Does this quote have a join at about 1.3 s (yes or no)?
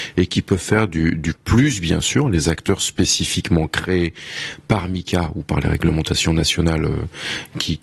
yes